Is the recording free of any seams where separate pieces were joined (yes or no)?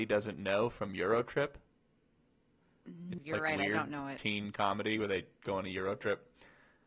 no